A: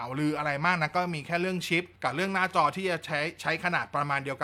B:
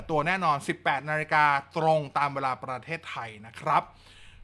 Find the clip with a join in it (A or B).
A